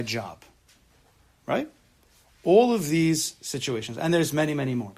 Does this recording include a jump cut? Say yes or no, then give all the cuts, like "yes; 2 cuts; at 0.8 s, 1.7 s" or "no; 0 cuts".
no; 0 cuts